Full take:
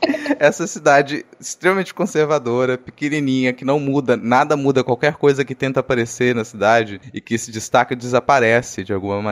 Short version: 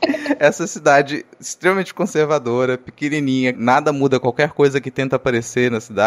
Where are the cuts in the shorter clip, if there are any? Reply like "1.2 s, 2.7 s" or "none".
3.5 s